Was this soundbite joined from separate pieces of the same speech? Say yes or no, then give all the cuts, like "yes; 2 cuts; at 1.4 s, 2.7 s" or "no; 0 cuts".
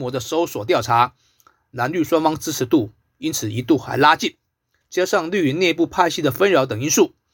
yes; 1 cut; at 4.8 s